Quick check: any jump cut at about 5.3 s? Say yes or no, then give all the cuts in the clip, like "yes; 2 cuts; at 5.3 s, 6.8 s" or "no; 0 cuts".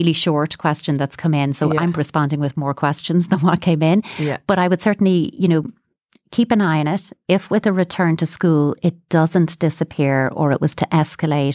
no; 1 cut; at 1.9 s